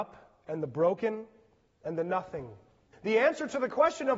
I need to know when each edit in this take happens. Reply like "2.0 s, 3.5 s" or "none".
2.9 s